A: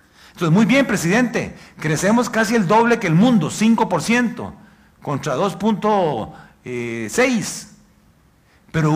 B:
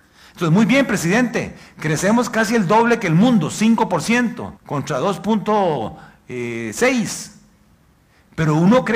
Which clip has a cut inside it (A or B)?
B